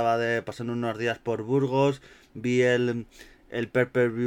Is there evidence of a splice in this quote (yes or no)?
no